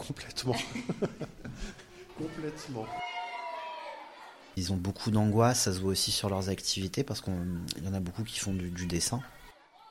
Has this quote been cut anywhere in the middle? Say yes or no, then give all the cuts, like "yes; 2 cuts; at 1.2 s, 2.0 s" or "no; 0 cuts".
yes; 1 cut; at 4.5 s